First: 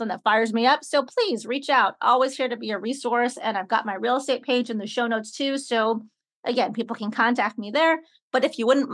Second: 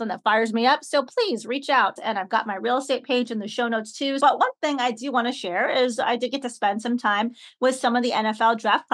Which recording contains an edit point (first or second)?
second